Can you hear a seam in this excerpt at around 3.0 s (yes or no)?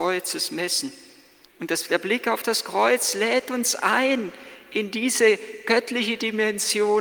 no